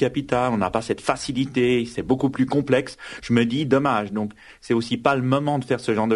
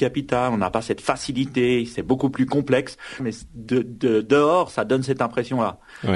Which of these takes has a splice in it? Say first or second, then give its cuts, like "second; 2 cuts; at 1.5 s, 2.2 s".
second; 1 cut; at 3.2 s